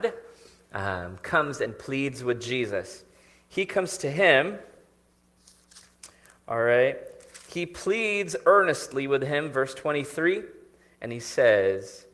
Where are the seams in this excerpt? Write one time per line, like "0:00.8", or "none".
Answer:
none